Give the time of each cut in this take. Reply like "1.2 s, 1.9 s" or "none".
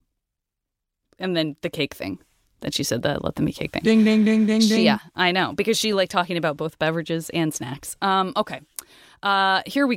none